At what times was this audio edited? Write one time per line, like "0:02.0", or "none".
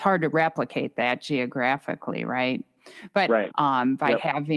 0:03.5